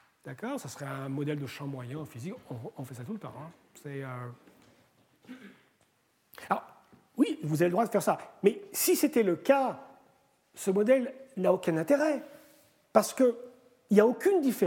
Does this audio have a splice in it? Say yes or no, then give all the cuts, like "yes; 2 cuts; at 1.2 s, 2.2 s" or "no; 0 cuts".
no; 0 cuts